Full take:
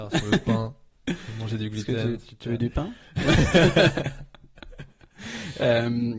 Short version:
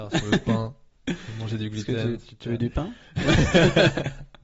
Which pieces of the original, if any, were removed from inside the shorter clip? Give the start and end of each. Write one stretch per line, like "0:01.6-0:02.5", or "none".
none